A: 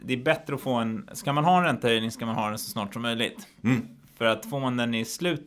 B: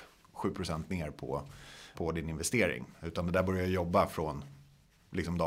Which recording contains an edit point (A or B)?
B